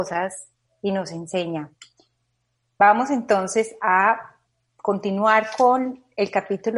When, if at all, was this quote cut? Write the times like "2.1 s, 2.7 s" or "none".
none